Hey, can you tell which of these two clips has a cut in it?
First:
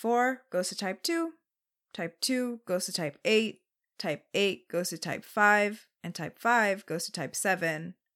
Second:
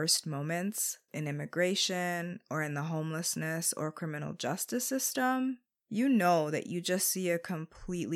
second; 1 cut; at 1.1 s

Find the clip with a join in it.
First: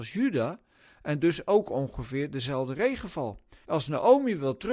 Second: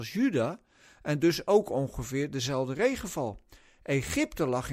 first; 1 cut; at 3.6 s

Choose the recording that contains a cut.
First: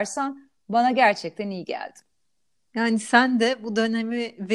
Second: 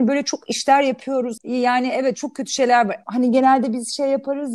second; 2 cuts; at 1.4 s, 3.0 s

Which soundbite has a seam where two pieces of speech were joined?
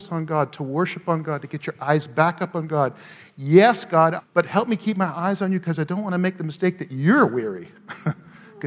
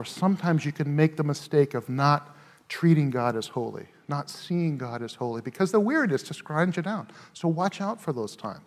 first; 1 cut; at 4.2 s

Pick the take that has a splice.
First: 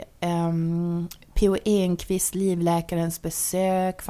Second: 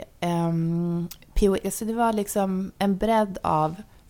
second; 1 cut; at 1.6 s

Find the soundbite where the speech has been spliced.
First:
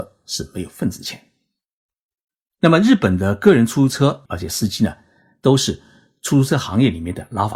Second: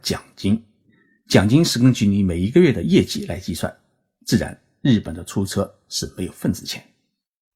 first; 1 cut; at 4.3 s

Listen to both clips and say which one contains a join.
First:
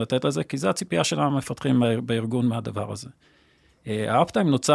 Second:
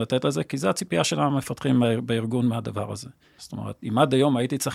second; 1 cut; at 3.4 s

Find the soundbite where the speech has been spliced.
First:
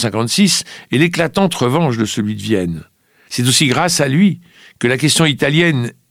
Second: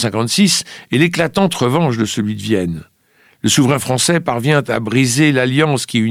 first; 1 cut; at 3.3 s

